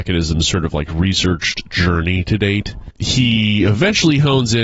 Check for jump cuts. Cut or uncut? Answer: cut